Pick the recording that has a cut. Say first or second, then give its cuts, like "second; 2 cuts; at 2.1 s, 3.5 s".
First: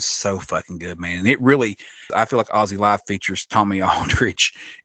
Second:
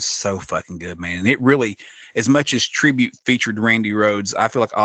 first; 1 cut; at 2.1 s